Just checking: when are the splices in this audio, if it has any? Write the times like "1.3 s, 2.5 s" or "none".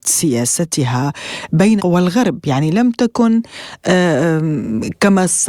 1.8 s